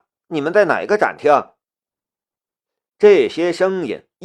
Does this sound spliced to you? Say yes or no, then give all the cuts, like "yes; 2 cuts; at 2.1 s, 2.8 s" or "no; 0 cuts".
no; 0 cuts